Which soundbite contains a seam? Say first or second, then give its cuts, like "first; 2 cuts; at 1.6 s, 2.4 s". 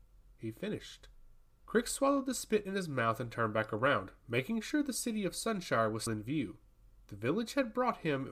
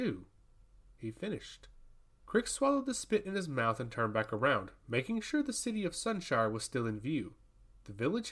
first; 1 cut; at 6.1 s